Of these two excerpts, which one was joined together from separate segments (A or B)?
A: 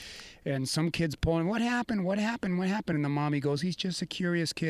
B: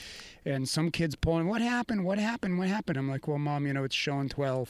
B